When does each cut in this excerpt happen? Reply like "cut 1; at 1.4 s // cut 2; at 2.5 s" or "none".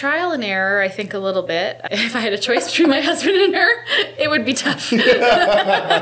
cut 1; at 1.9 s